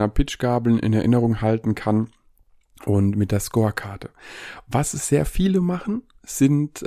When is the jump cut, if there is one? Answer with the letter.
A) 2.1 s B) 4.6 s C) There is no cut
C